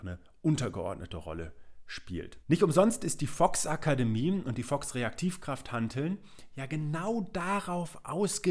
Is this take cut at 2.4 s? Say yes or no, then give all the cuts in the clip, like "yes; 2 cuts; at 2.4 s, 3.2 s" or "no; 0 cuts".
yes; 1 cut; at 2.4 s